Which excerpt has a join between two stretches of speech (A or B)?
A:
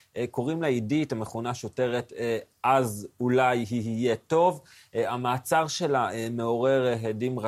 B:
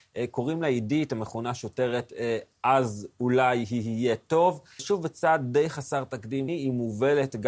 B